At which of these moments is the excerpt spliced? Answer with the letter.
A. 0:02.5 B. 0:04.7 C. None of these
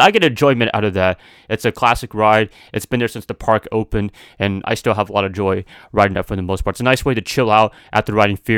C